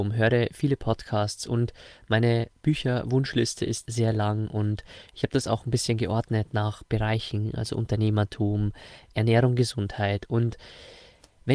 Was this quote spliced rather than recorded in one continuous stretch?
yes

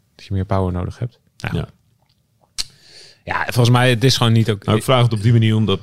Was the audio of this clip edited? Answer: no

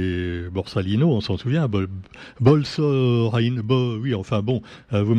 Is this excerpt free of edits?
yes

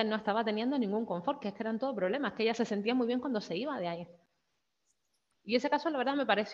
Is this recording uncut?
no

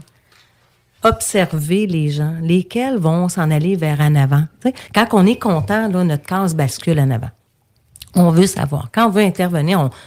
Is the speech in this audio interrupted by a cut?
no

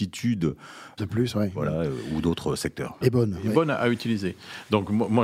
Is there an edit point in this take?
yes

